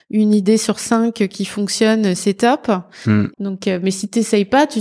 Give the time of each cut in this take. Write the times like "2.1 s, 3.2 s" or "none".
3.3 s